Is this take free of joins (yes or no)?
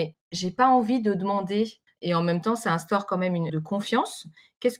no